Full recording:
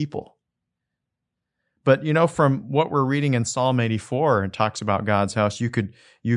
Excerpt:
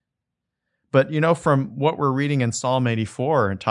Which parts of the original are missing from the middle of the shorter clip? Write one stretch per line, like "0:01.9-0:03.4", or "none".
none